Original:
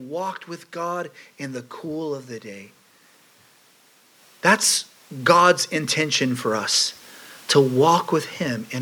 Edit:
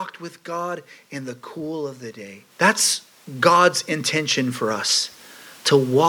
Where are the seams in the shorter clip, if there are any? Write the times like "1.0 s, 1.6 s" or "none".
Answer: 2.5 s

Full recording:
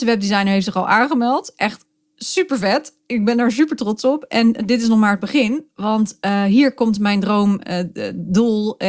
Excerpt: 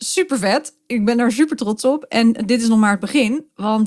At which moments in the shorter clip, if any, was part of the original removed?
none

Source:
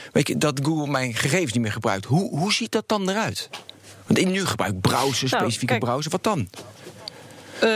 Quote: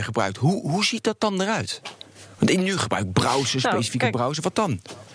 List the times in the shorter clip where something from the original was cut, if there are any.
none

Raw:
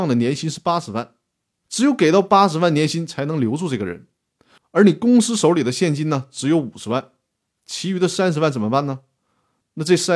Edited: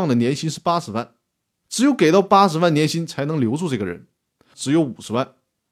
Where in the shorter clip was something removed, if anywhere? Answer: 4.5 s

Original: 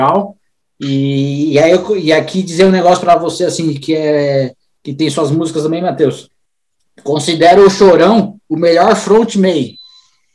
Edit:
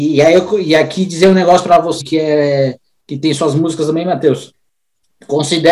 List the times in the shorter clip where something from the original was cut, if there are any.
2.0 s

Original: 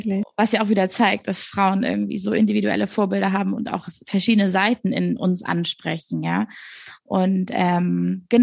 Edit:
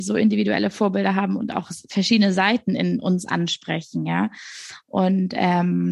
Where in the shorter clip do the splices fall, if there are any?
none

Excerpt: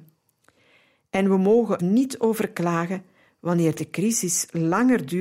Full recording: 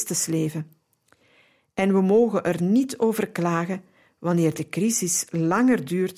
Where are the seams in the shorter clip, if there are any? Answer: 1.8 s

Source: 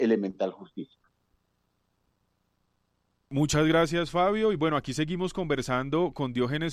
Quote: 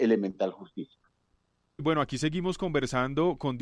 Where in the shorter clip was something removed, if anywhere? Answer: 1.8 s

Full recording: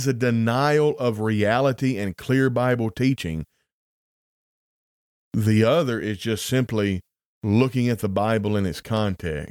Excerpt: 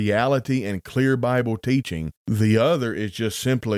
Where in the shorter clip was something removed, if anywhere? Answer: 2.2 s

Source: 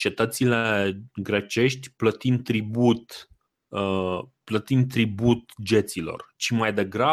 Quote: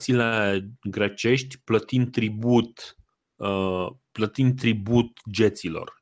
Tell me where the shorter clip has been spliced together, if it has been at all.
none

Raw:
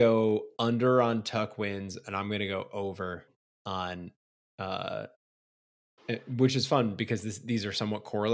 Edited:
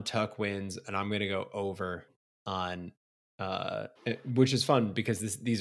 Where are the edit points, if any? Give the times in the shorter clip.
3.9 s

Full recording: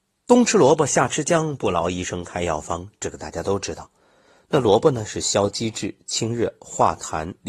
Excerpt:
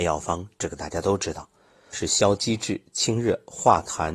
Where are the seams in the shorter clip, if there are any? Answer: 1.9 s

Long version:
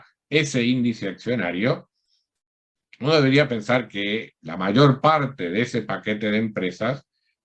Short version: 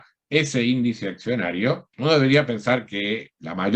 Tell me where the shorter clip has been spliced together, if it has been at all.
1.9 s

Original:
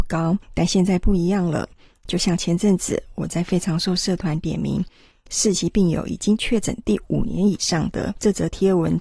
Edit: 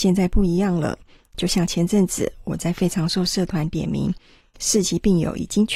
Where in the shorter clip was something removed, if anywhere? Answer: none

